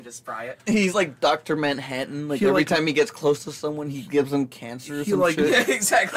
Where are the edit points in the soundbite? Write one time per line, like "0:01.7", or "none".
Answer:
none